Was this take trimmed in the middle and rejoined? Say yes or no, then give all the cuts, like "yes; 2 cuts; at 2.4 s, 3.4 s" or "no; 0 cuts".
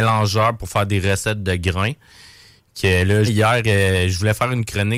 yes; 1 cut; at 3.3 s